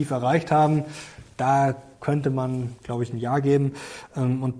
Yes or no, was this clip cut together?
no